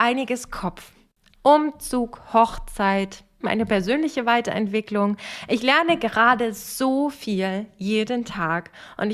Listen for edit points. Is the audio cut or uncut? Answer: cut